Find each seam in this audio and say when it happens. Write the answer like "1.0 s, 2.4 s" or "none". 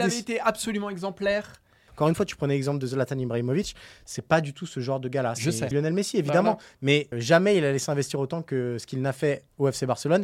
1.9 s, 5.7 s, 7.1 s